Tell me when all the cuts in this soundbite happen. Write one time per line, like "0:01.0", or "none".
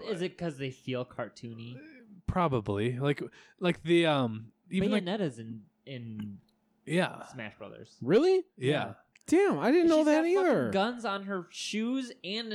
none